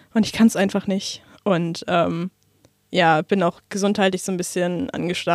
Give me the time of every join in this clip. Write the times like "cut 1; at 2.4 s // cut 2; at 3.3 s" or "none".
none